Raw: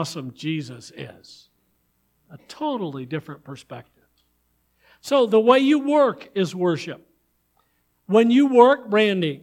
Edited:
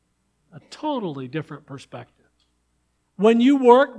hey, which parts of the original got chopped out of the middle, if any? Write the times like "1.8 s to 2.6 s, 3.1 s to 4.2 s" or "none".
4.7 s to 7.9 s